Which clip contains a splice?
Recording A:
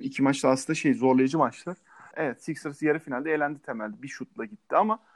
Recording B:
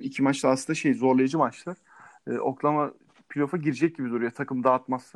A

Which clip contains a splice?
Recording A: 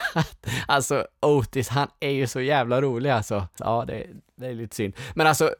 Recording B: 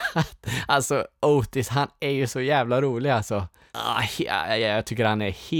A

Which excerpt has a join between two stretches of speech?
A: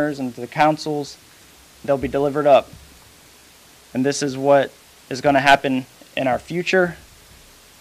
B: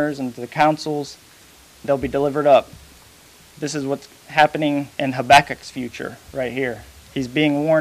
B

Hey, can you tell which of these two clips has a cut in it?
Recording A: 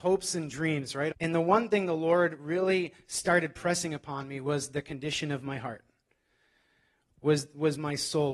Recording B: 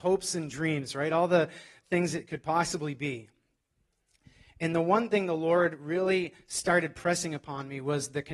A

